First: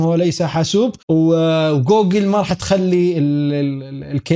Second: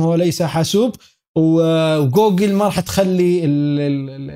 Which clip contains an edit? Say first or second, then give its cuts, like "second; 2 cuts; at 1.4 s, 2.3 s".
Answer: first; 1 cut; at 1.0 s